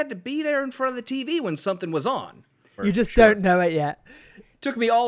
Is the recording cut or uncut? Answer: cut